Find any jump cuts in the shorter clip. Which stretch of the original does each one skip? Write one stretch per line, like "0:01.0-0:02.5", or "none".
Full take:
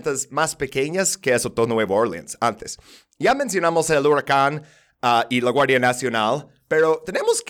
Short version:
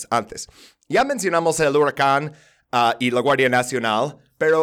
none